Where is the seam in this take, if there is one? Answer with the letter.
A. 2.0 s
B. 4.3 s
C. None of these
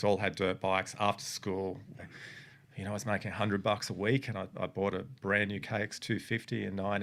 A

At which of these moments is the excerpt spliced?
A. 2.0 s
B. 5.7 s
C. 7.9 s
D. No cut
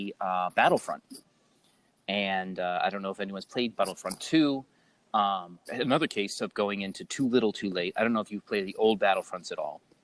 B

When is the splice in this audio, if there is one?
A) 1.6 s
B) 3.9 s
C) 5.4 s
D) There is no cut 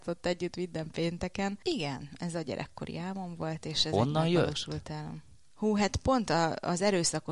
A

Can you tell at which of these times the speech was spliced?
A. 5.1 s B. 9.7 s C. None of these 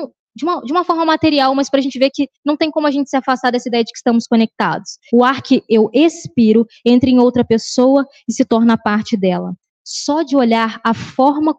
A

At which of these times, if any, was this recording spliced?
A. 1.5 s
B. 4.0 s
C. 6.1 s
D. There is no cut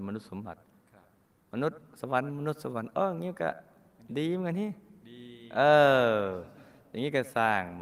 D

